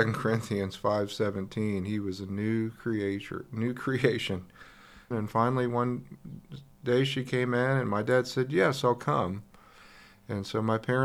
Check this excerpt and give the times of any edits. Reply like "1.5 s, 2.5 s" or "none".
5.1 s